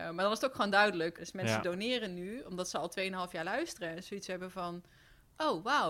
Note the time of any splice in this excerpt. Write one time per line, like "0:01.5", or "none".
0:01.2